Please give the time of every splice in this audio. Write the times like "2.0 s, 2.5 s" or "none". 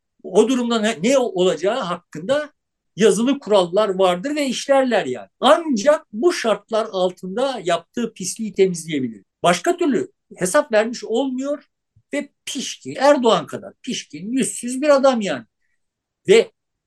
5.3 s, 9.2 s, 12.9 s